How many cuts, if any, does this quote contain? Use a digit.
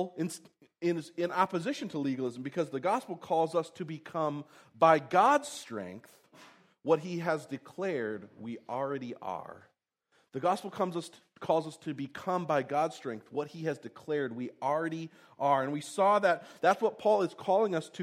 0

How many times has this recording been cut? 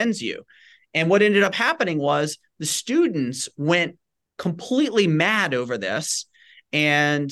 0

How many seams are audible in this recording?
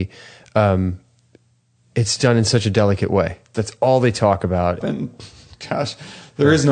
2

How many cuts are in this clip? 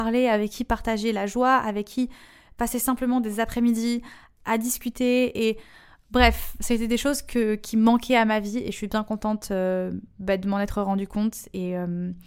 0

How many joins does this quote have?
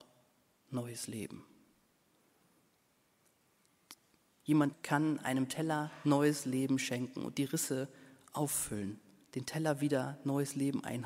2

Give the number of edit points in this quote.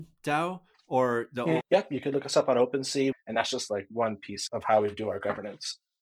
3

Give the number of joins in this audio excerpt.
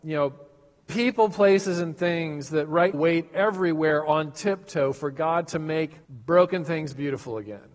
2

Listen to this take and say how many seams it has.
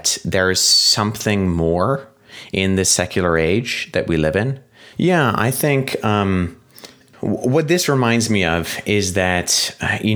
1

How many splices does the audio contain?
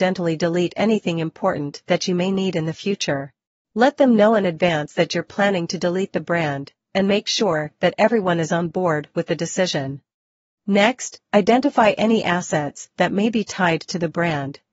2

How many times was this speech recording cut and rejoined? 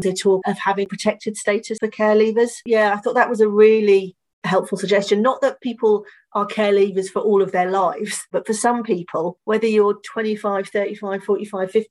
0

